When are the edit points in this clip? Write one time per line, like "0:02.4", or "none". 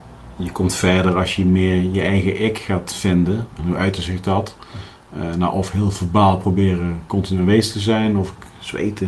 0:03.6